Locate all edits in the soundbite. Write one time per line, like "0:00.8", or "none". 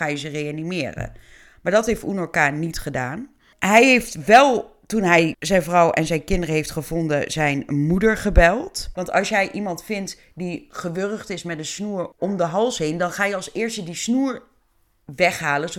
0:08.9